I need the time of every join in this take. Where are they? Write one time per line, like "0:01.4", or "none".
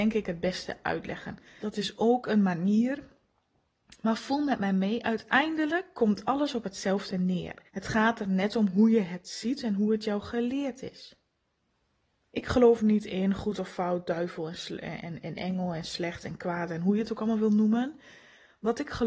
0:01.6
0:07.7